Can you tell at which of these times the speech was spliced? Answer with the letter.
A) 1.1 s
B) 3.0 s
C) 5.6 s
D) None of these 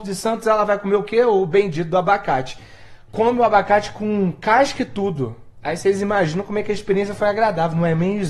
D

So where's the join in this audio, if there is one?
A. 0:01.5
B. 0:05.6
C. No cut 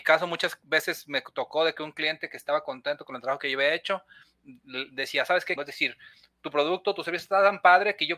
B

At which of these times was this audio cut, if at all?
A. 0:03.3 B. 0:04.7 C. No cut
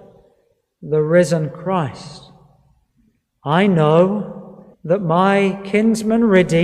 B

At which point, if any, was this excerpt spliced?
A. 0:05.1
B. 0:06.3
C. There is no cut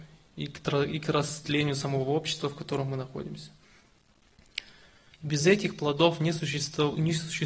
A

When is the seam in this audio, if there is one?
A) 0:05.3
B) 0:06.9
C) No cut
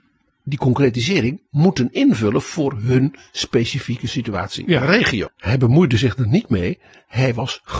A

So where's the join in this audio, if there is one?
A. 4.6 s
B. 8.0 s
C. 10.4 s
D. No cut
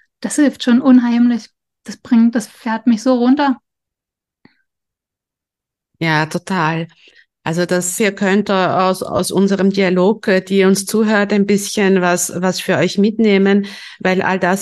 B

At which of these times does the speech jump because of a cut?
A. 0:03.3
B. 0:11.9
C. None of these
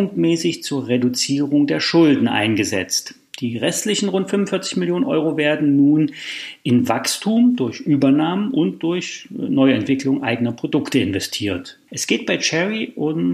B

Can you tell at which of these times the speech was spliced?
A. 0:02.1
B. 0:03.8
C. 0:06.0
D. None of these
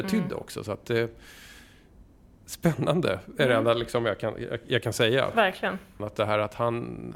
C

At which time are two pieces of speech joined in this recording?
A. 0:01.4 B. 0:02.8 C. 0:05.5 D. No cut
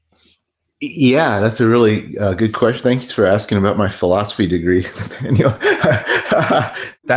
D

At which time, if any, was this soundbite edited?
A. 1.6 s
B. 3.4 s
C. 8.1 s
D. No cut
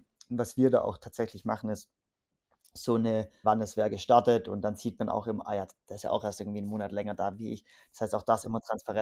B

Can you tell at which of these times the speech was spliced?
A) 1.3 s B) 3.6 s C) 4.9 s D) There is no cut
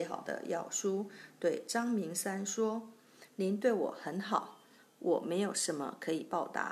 D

